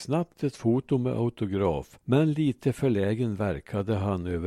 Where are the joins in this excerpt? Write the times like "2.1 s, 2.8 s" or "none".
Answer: 2.0 s